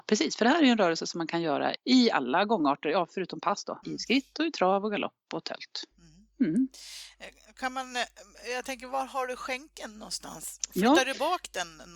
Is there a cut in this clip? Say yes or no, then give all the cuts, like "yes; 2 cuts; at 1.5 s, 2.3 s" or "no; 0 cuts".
yes; 2 cuts; at 1.8 s, 3.8 s